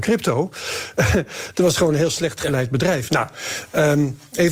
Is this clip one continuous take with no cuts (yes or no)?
no